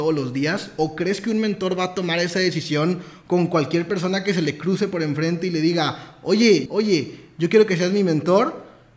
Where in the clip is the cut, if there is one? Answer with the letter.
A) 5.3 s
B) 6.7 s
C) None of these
B